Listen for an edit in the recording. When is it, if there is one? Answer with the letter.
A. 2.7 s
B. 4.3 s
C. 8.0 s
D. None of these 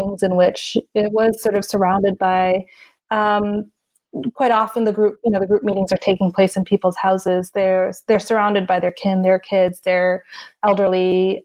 D